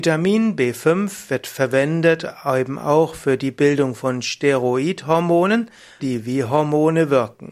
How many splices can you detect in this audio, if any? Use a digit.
1